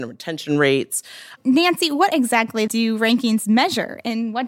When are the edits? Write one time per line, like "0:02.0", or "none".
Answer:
0:01.4
0:02.7